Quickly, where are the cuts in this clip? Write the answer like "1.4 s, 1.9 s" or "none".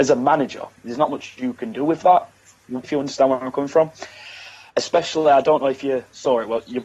2.8 s, 4.7 s